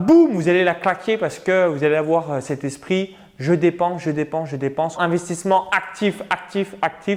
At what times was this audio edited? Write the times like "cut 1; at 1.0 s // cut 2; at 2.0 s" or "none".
cut 1; at 5.0 s